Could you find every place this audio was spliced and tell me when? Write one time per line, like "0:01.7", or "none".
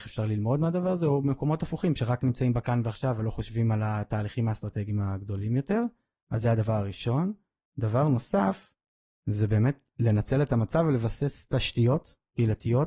none